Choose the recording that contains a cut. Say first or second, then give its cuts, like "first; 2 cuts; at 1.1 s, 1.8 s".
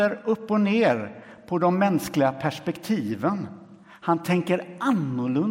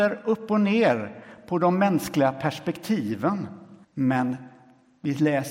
second; 1 cut; at 3.8 s